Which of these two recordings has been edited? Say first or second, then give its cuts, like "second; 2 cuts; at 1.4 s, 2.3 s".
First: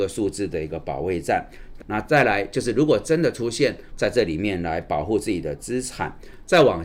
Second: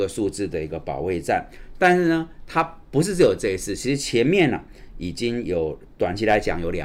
first; 2 cuts; at 1.8 s, 3.9 s